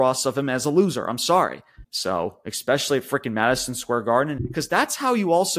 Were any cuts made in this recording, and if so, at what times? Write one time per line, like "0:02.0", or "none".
0:01.8
0:04.4